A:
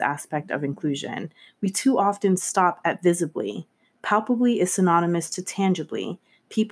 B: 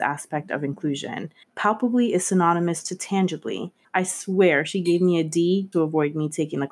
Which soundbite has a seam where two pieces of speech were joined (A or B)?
B